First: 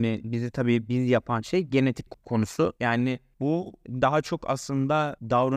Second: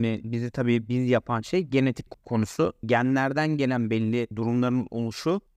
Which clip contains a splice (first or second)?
first